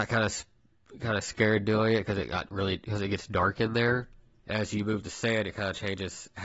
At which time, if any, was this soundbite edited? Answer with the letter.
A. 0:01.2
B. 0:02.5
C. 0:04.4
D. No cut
C